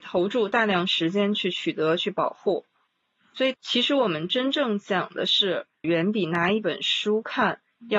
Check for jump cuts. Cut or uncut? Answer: cut